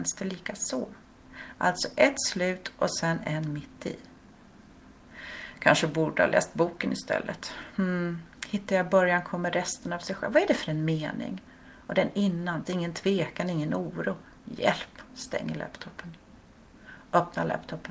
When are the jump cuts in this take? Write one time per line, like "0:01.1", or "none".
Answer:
0:12.6
0:15.1

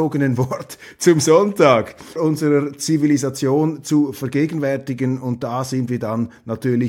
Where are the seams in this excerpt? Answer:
0:02.2

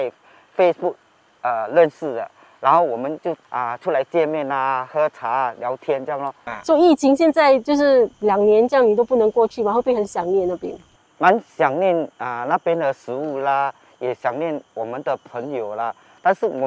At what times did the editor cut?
0:14.6

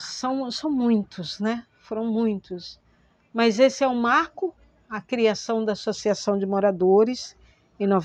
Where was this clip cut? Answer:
none

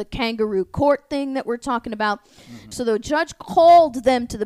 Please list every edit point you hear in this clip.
0:02.7

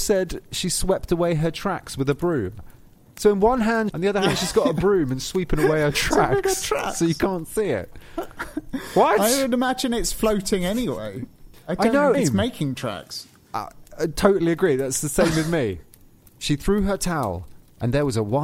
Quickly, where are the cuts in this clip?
0:03.9
0:12.1
0:16.2

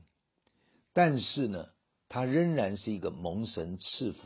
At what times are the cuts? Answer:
none

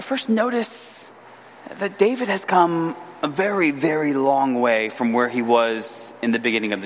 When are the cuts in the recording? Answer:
none

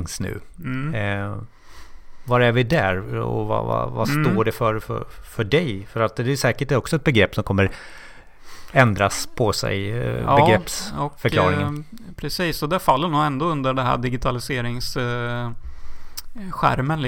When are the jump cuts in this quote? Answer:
none

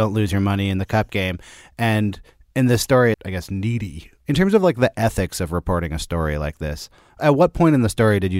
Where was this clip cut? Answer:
0:03.1

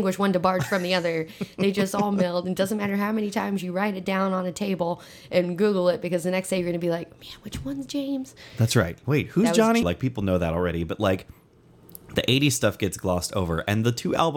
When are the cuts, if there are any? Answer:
0:09.8

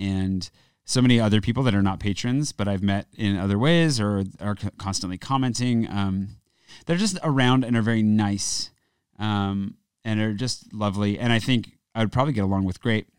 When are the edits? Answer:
none

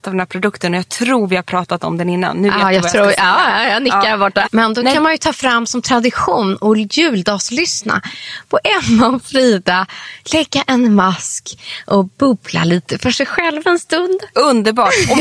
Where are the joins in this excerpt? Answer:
0:04.4

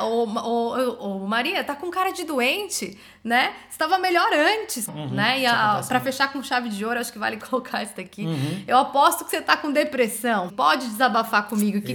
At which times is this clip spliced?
0:04.9
0:10.5

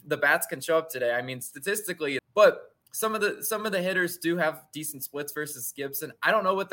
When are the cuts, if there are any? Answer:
0:02.2

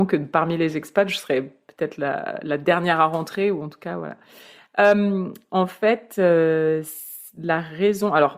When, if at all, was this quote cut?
none

